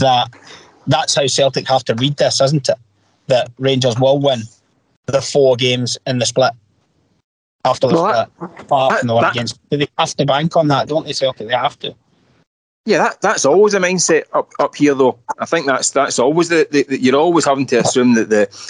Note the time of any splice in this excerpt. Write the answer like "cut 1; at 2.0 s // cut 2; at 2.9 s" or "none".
none

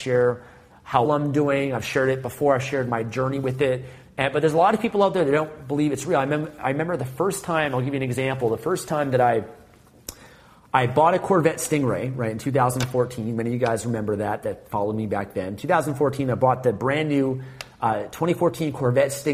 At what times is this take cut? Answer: cut 1; at 1.1 s

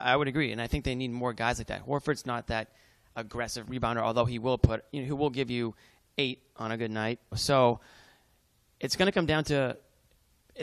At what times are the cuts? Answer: cut 1; at 3.7 s // cut 2; at 7.3 s

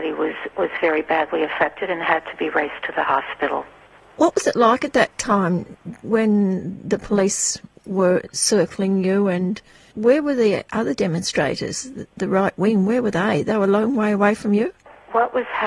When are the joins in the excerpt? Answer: cut 1; at 6.0 s

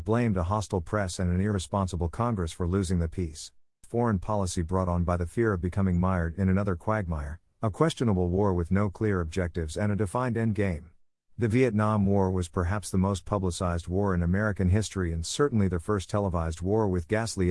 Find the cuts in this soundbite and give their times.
cut 1; at 3.8 s // cut 2; at 11.3 s

